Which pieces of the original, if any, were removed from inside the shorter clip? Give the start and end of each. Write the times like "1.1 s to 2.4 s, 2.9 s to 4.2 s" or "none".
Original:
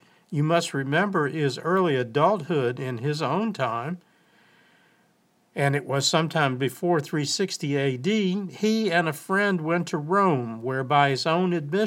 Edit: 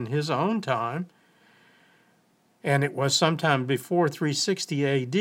none